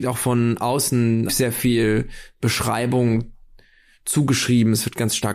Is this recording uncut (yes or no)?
no